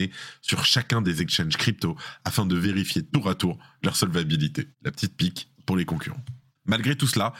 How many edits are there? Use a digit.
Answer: 0